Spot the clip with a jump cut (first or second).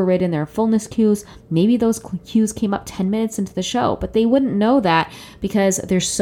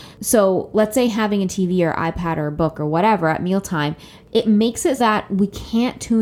second